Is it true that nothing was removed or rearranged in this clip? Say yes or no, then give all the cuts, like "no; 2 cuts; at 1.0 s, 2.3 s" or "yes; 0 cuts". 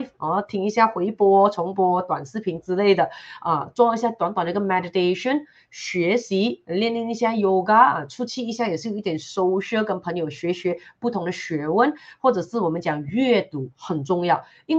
yes; 0 cuts